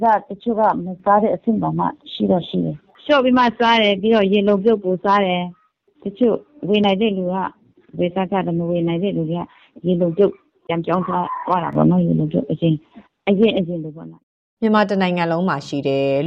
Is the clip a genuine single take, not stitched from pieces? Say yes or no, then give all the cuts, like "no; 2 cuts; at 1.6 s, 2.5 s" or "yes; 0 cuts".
no; 1 cut; at 2.0 s